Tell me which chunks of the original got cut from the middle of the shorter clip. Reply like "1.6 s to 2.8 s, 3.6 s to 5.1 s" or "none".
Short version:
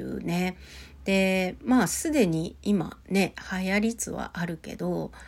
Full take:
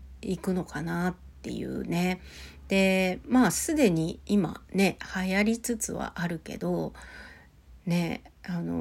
5.6 s to 5.8 s